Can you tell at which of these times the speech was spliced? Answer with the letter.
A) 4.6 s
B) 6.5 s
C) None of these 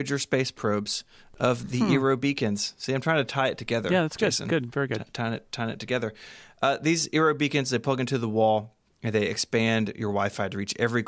C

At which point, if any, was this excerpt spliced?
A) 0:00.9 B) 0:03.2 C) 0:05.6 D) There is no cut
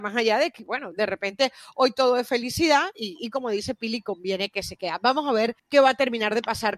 C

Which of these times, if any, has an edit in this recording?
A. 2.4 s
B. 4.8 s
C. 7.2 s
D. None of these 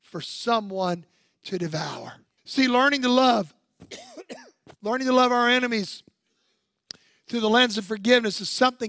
A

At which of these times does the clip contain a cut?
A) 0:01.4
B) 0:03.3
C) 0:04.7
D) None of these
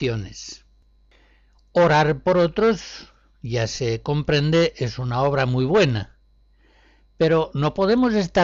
D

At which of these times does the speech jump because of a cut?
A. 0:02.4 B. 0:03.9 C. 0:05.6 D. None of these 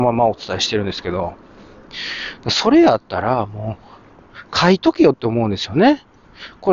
D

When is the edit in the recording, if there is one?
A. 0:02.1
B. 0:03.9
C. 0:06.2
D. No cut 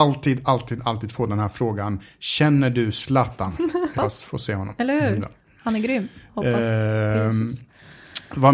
B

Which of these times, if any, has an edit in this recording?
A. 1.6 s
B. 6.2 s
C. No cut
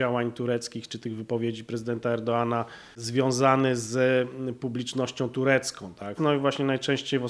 B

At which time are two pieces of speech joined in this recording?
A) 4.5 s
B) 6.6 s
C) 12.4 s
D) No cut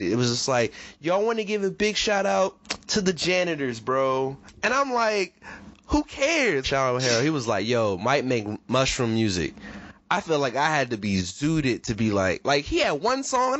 B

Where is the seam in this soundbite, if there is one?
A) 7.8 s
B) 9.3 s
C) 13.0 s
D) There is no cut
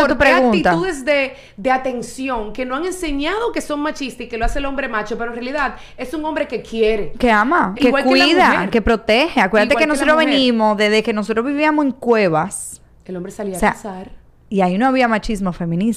A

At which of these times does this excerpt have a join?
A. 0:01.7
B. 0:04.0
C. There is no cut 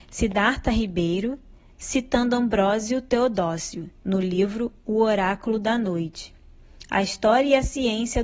B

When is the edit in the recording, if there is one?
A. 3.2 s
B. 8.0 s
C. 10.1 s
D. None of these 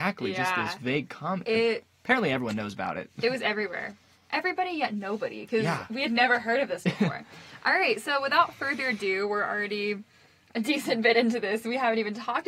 D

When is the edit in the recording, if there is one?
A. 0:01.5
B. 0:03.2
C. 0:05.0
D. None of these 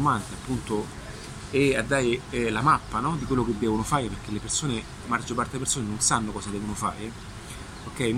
C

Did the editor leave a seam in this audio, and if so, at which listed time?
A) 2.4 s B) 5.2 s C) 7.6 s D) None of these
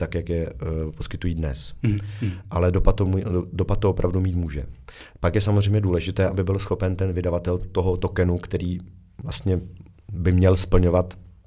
C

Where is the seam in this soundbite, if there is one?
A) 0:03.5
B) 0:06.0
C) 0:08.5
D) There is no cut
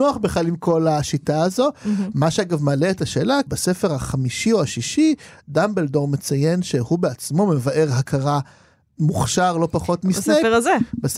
A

